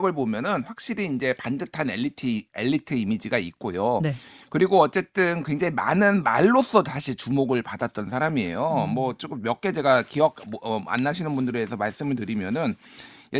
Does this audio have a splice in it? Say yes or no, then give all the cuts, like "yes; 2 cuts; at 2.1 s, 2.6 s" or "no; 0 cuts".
no; 0 cuts